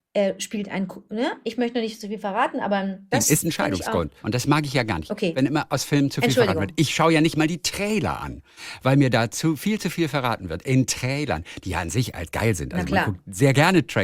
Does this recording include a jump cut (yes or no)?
yes